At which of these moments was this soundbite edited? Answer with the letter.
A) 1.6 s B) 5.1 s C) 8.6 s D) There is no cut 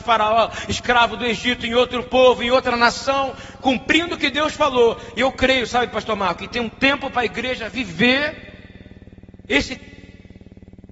D